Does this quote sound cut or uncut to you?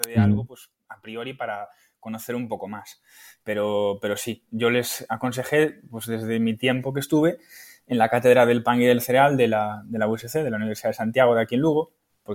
uncut